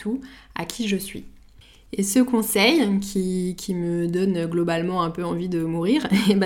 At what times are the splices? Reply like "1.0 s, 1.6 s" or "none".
none